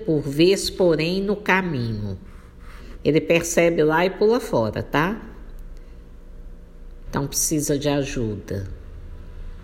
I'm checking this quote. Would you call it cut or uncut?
cut